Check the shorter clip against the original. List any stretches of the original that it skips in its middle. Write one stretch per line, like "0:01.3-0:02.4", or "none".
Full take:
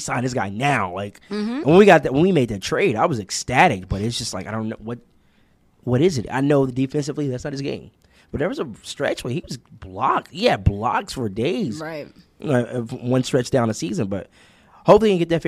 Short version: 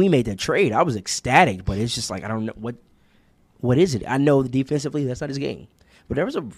none